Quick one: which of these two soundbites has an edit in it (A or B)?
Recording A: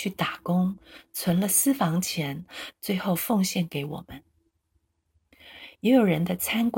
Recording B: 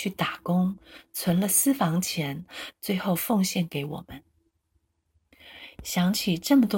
B